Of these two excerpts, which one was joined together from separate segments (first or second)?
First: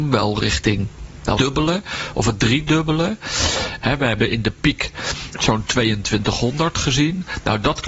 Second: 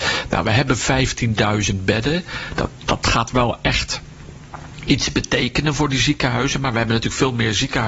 first